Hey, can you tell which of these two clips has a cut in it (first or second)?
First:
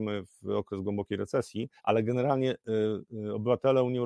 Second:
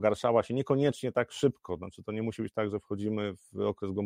first